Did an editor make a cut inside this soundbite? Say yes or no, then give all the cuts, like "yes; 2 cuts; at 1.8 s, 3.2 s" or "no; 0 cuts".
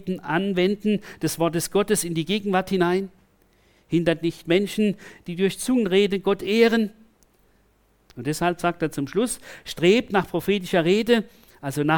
yes; 1 cut; at 8.1 s